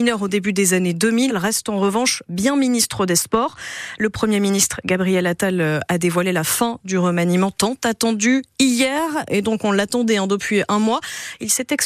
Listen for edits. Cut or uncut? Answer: cut